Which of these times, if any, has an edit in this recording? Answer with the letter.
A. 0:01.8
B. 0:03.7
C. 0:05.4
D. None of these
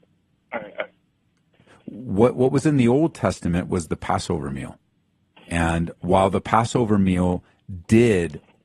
C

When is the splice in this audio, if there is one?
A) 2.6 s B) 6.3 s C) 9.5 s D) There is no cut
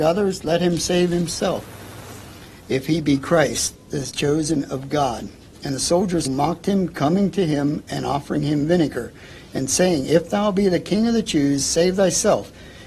B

